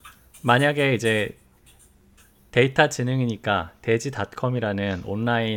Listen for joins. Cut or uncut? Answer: uncut